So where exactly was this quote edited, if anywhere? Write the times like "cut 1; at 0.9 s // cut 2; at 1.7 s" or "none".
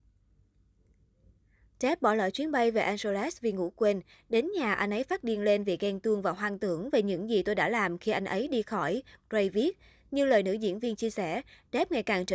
none